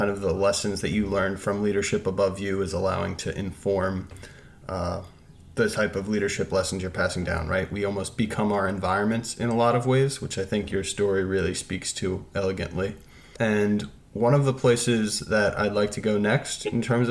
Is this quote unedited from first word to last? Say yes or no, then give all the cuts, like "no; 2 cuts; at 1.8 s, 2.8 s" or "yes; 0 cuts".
yes; 0 cuts